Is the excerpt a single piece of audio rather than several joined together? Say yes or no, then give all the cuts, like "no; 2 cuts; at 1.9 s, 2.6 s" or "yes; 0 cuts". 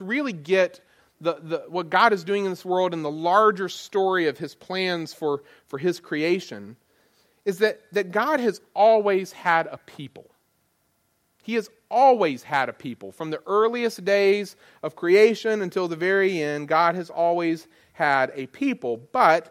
yes; 0 cuts